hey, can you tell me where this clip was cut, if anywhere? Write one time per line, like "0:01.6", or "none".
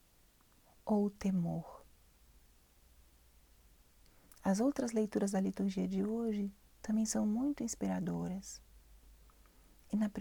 none